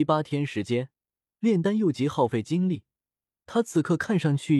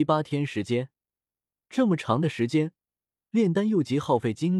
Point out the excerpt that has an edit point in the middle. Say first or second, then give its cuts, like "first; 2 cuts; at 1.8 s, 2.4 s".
first; 1 cut; at 1.3 s